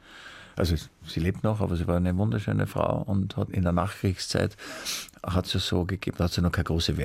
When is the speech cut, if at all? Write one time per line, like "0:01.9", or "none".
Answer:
none